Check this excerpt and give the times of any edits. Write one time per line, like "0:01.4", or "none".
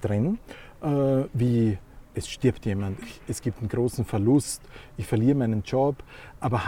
0:03.0